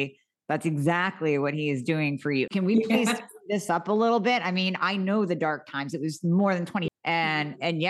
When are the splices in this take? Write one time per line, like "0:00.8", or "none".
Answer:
0:02.5
0:06.9